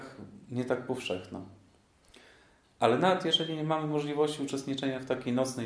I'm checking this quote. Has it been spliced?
no; 0 cuts

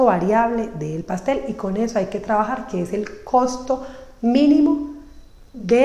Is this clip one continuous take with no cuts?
yes; 0 cuts

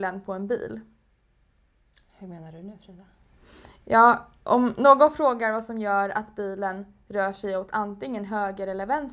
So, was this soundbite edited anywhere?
no; 0 cuts

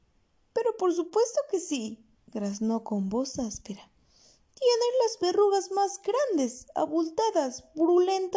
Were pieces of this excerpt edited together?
no; 0 cuts

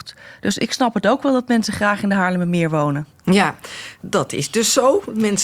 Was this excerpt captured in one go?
yes; 0 cuts

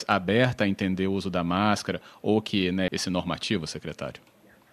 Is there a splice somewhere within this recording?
yes; 1 cut; at 2.9 s

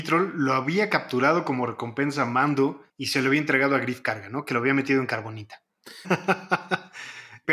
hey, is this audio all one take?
no; 1 cut; at 6.0 s

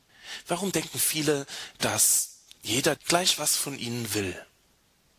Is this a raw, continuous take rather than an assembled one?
no; 1 cut; at 3.0 s

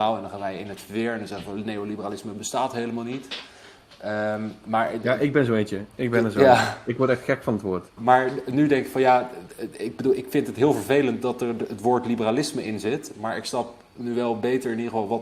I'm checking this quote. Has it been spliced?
yes; 1 cut; at 8.0 s

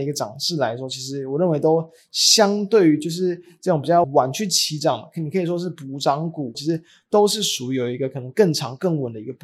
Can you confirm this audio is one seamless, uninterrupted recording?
no; 2 cuts; at 4.0 s, 6.5 s

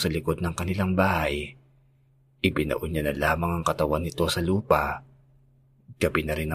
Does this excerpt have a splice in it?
no; 0 cuts

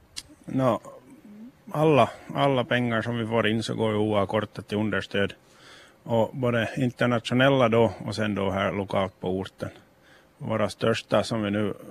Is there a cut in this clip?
no; 0 cuts

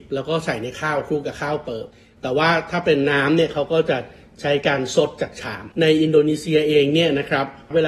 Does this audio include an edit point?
yes; 1 cut; at 5.7 s

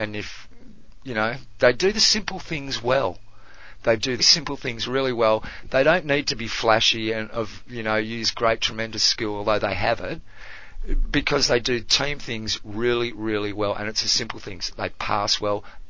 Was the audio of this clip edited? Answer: yes; 1 cut; at 4.2 s

